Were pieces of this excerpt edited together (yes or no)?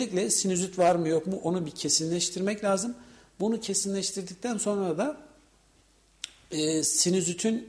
no